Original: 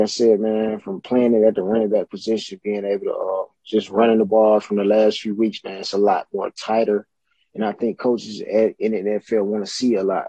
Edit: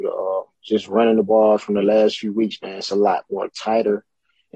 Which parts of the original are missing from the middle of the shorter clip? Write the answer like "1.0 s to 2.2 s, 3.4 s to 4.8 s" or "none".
none